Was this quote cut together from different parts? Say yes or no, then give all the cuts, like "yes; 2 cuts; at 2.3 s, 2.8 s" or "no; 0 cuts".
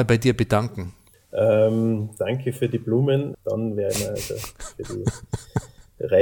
yes; 2 cuts; at 1.1 s, 3.3 s